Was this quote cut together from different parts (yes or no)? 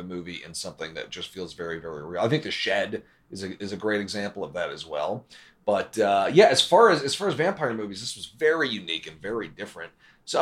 no